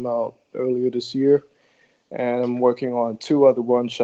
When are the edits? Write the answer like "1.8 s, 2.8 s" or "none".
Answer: none